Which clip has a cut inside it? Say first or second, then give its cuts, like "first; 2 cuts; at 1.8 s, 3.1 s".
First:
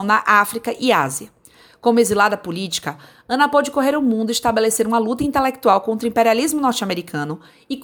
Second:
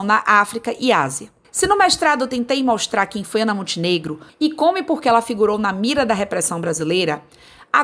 second; 2 cuts; at 1.4 s, 4.3 s